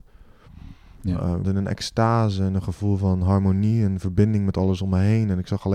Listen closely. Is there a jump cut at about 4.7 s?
no; 1 cut; at 1.4 s

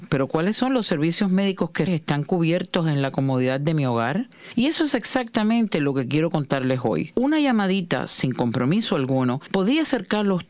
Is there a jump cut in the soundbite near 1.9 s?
yes; 2 cuts; at 1.9 s, 7.1 s

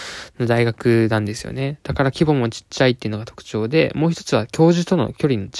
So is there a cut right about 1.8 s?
no; 0 cuts

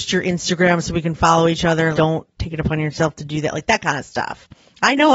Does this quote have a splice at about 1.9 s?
yes; 1 cut; at 1.9 s

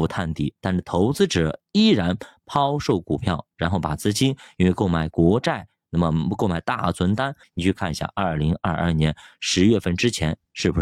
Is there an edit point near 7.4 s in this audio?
yes; 1 cut; at 7.4 s

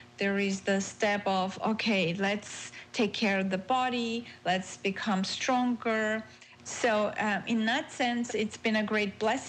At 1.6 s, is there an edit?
no; 2 cuts; at 6.6 s, 8.3 s

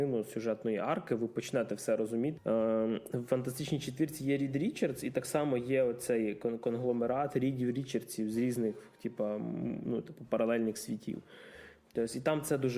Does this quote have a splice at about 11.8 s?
no; 1 cut; at 2.4 s

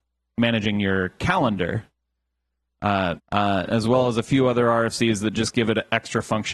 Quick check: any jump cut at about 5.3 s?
no; 1 cut; at 3.2 s

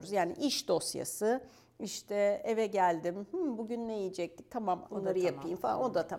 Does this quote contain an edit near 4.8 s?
yes; 1 cut; at 4.8 s

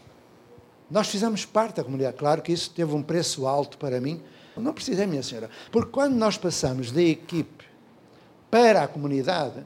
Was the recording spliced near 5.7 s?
yes; 2 cuts; at 4.6 s, 5.7 s

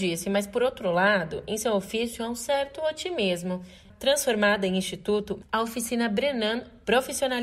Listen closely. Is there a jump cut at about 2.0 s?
no; 2 cuts; at 3.9 s, 5.4 s

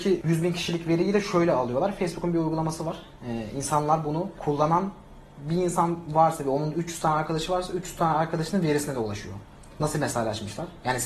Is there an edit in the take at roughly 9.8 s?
yes; 1 cut; at 9.8 s

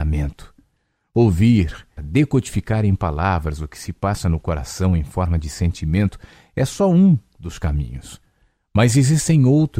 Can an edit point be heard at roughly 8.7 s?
no; 1 cut; at 2.0 s

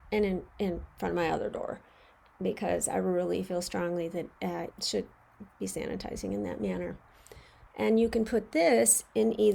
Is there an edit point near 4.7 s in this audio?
yes; 2 cuts; at 4.7 s, 7.7 s

